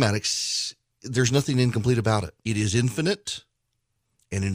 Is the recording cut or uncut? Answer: cut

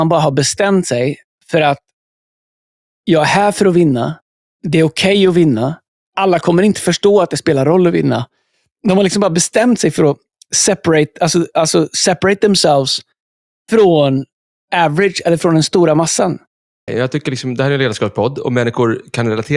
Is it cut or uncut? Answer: cut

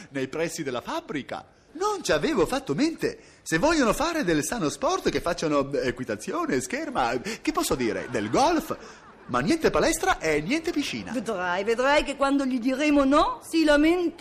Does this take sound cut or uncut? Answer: cut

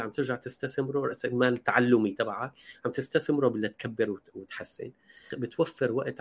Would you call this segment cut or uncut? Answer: cut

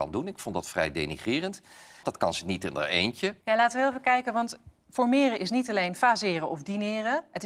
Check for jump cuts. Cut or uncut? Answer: cut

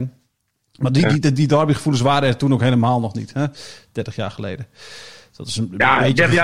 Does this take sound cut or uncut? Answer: uncut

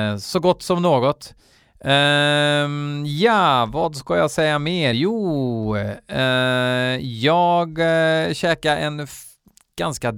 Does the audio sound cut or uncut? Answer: uncut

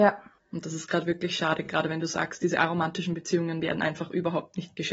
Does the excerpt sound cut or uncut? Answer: uncut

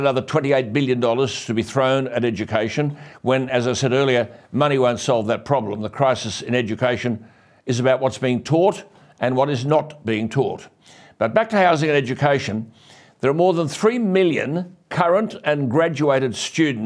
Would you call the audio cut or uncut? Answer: uncut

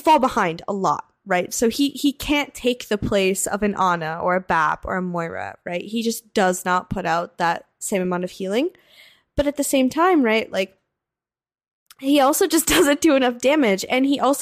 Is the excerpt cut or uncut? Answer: uncut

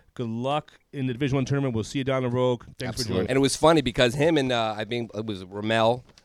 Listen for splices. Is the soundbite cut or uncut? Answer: cut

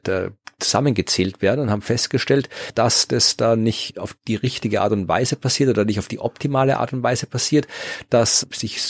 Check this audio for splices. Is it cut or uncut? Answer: uncut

